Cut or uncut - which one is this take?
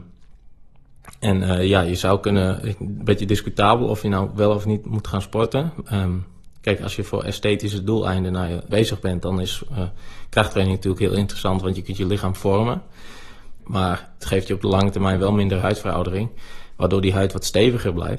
cut